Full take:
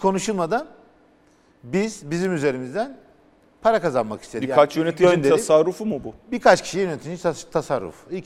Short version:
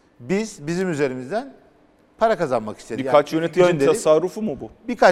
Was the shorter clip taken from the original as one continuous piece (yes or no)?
yes